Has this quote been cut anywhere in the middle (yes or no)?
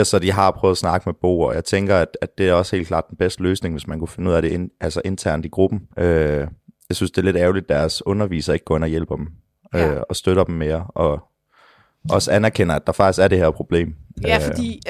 yes